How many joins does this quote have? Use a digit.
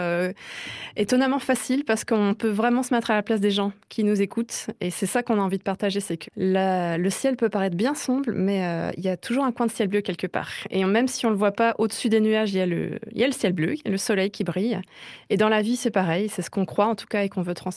1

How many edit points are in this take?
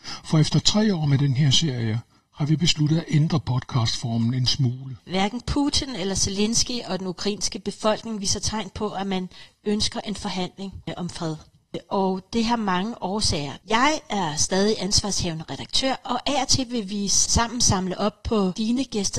2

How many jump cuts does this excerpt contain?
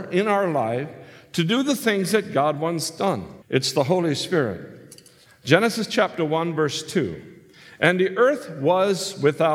1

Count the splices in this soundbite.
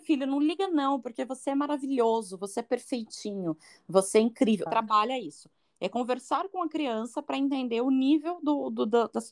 1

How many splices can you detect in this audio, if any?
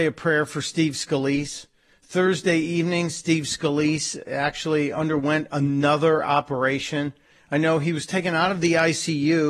0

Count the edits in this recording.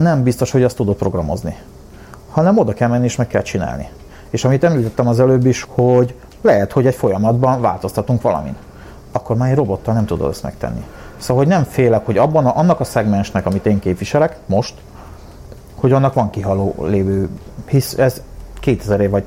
1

